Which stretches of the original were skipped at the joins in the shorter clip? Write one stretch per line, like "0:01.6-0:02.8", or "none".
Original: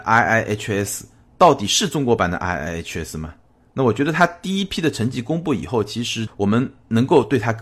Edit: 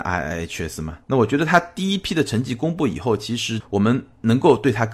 0:03.4-0:03.7